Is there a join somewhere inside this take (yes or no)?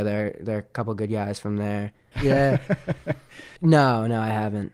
yes